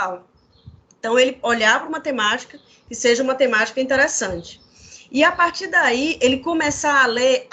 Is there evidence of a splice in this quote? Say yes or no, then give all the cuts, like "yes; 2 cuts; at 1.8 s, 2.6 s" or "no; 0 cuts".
no; 0 cuts